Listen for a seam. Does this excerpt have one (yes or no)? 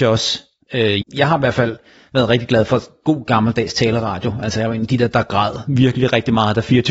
yes